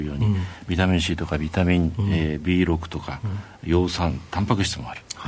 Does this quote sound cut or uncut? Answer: uncut